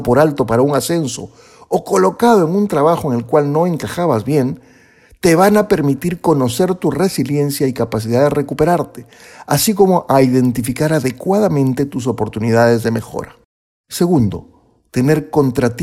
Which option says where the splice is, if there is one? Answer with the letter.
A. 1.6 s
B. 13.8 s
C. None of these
B